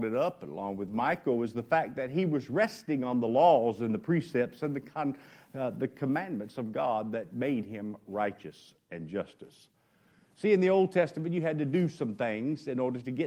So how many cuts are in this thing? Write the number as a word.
zero